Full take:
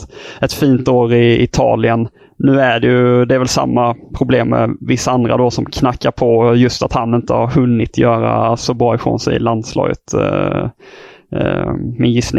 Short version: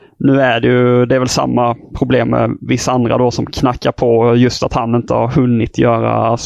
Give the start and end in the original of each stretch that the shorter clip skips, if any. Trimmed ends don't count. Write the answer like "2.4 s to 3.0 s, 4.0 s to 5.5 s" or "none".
none